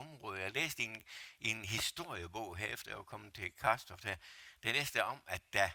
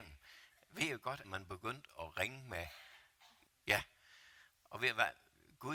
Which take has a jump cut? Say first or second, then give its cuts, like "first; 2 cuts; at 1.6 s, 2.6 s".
second; 2 cuts; at 1.2 s, 3.5 s